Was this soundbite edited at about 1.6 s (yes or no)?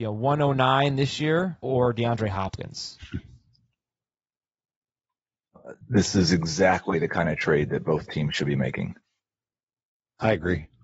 yes